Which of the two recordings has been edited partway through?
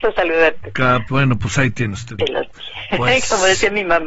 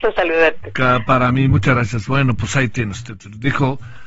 first; 2 cuts; at 1.1 s, 2.2 s

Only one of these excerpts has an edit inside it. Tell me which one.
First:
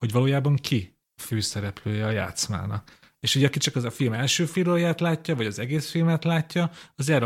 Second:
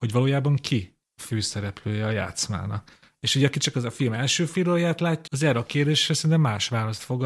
second; 1 cut; at 5.3 s

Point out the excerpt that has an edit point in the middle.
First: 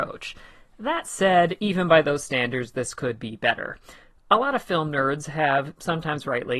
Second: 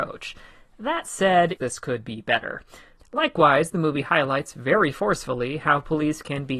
second; 2 cuts; at 1.6 s, 3.0 s

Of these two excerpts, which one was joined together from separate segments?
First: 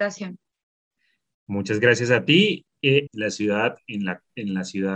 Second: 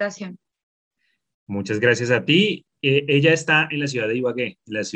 first; 1 cut; at 3.1 s

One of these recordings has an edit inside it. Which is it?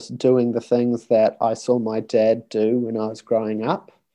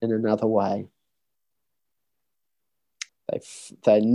second; 1 cut; at 3.1 s

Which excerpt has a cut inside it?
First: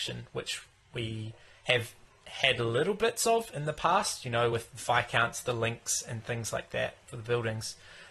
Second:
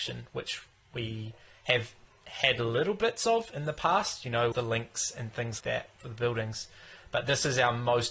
second; 2 cuts; at 4.5 s, 5.6 s

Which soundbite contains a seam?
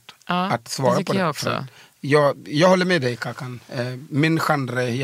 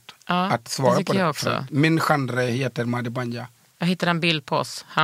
second; 1 cut; at 1.7 s

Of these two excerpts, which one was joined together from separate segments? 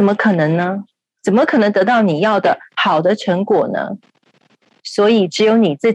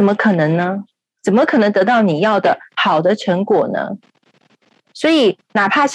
first; 1 cut; at 4.8 s

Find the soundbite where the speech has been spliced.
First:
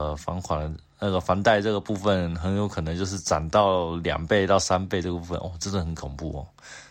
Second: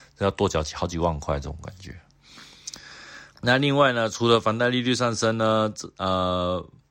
second; 1 cut; at 3.3 s

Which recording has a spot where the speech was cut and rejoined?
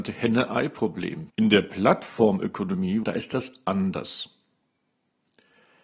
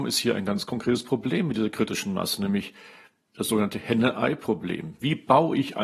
first; 2 cuts; at 1.3 s, 3.0 s

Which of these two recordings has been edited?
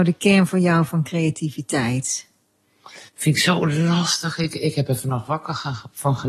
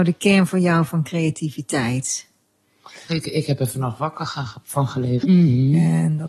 second; 2 cuts; at 3.1 s, 5.2 s

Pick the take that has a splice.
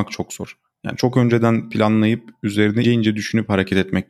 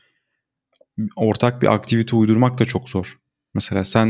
first; 1 cut; at 2.8 s

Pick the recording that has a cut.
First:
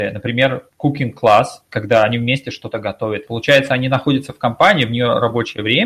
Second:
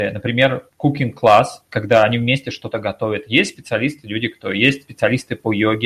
first; 1 cut; at 3.3 s

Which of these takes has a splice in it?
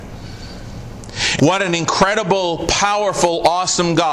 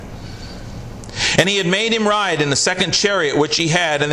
first; 1 cut; at 1.4 s

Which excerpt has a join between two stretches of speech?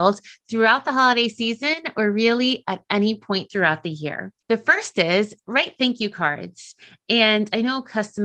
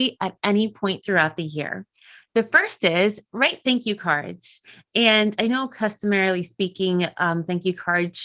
first; 1 cut; at 4.4 s

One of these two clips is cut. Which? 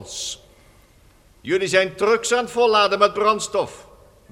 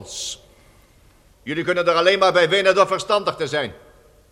second; 1 cut; at 1.3 s

